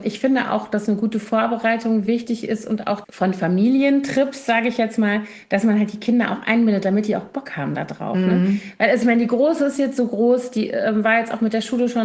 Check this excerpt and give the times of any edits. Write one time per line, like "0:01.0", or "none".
0:03.0